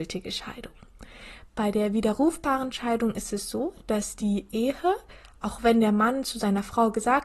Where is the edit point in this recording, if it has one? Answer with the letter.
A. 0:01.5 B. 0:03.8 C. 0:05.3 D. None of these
D